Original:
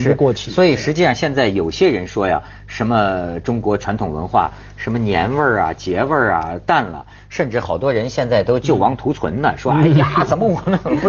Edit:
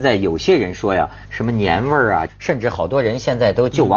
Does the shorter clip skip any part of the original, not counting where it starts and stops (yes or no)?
yes